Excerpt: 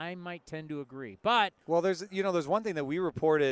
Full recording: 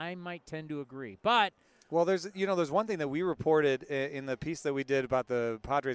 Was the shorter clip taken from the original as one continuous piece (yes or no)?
no